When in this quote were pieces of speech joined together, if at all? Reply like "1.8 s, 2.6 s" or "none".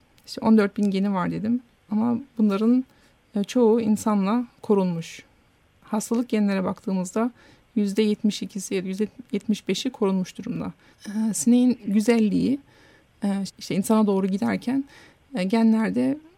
10.9 s, 13.5 s